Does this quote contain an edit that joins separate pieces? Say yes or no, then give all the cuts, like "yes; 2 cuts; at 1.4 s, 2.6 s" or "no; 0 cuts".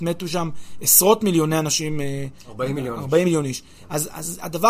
no; 0 cuts